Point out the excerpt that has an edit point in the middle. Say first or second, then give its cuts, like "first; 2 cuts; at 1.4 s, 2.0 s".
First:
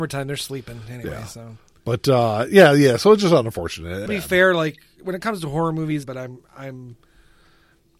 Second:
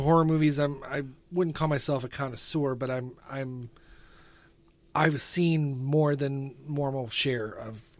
first; 2 cuts; at 4.1 s, 6.0 s